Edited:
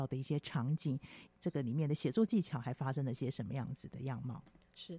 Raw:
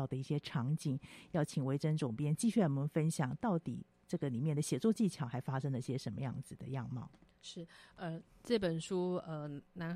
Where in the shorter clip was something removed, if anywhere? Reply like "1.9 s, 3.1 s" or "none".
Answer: 1.3 s